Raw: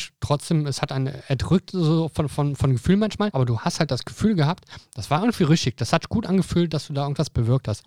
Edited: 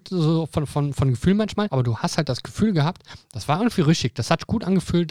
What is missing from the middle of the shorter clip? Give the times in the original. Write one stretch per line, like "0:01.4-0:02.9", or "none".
none